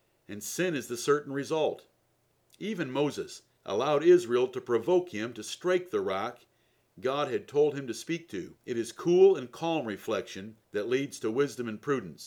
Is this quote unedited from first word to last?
no; 3 cuts; at 3.6 s, 8.6 s, 10.6 s

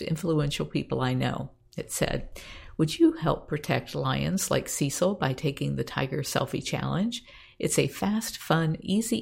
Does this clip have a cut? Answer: no; 0 cuts

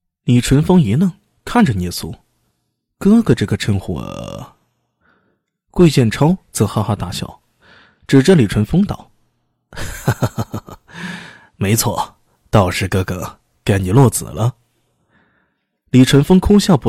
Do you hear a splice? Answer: no; 0 cuts

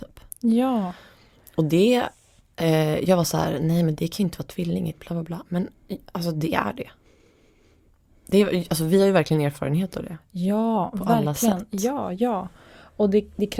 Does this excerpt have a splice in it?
no; 0 cuts

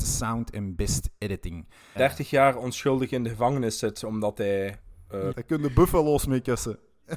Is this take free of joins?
no; 2 cuts; at 2.0 s, 5.3 s

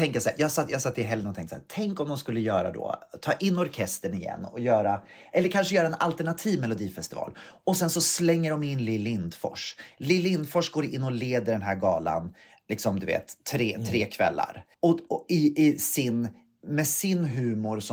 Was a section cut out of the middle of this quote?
yes; 1 cut; at 14.7 s

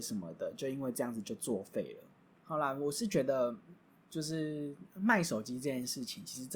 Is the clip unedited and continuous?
yes; 0 cuts

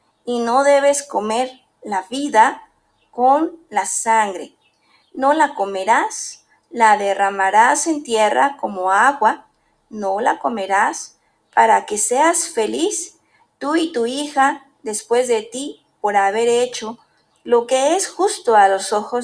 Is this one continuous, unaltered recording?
yes; 0 cuts

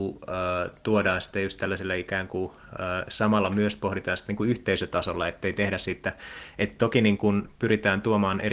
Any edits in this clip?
no; 0 cuts

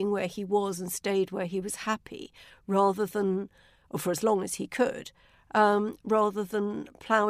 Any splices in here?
no; 0 cuts

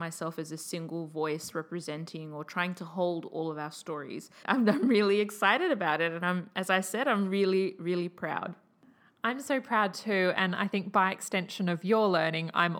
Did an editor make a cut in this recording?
yes; 1 cut; at 4.4 s

